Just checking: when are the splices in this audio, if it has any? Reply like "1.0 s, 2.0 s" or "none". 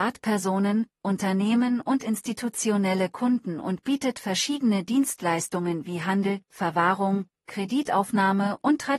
6.4 s

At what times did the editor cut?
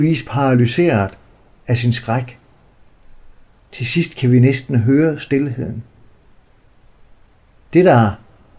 3.6 s

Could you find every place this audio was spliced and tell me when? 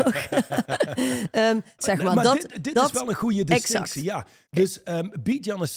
1.8 s

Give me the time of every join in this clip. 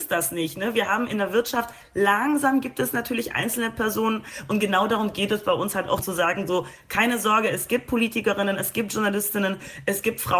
6.0 s

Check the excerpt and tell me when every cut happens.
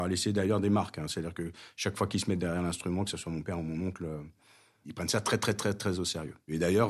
none

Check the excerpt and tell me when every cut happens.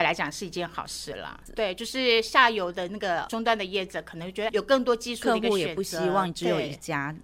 1.5 s, 4.5 s

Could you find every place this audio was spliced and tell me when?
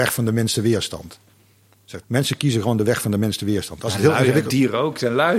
2.0 s

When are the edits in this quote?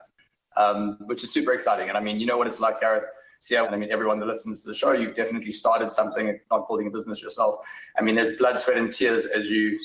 3.6 s

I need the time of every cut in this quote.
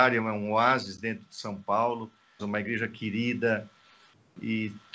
2.4 s

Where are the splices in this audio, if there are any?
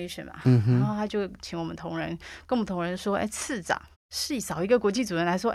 3.9 s

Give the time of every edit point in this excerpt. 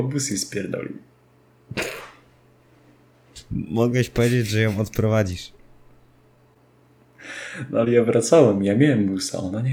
none

